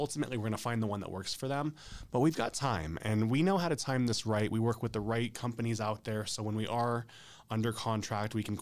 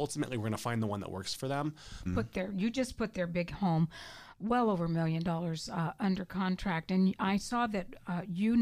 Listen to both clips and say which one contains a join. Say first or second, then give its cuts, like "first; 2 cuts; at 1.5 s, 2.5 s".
second; 1 cut; at 2.1 s